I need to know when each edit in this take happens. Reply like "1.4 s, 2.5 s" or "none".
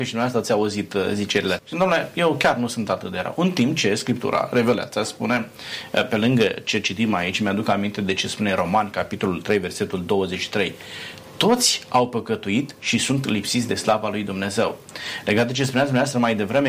1.6 s